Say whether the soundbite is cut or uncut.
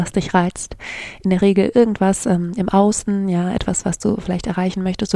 uncut